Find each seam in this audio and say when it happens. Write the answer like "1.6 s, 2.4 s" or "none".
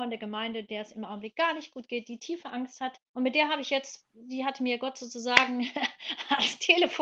3.1 s